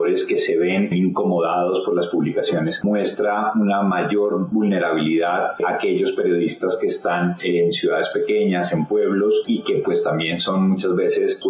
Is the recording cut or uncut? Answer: cut